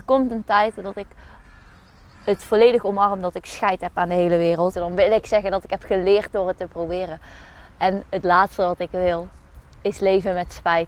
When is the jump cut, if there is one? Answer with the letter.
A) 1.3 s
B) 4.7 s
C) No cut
B